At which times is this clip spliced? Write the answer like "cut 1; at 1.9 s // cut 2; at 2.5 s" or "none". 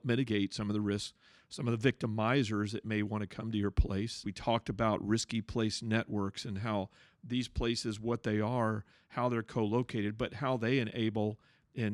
cut 1; at 4.2 s